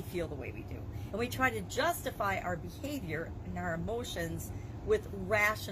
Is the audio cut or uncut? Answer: uncut